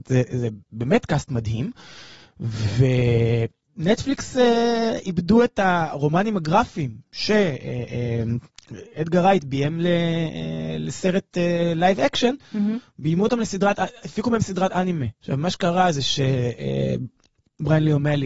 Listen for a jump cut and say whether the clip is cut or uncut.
cut